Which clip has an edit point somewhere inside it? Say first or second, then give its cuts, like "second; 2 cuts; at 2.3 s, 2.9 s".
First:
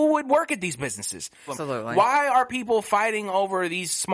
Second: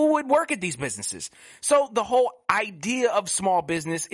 first; 1 cut; at 1.5 s